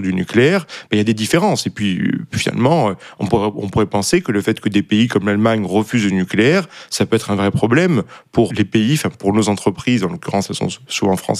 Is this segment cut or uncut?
cut